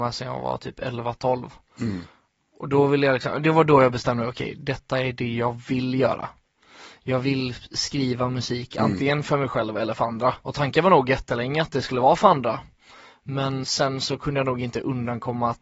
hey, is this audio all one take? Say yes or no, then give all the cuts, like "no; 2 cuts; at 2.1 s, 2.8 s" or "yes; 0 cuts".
no; 2 cuts; at 10.4 s, 13.6 s